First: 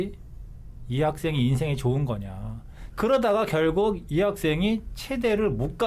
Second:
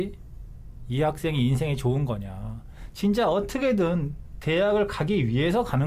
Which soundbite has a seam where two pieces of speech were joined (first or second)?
first